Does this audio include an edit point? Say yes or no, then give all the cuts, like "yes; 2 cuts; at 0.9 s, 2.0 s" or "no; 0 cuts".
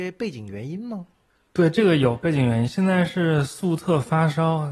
no; 0 cuts